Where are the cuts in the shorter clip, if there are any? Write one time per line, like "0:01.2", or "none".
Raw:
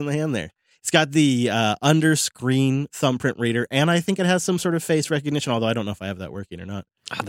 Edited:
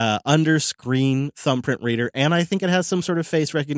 none